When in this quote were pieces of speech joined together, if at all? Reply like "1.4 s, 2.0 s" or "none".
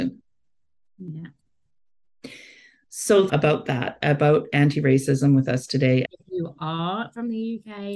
3.3 s, 6.1 s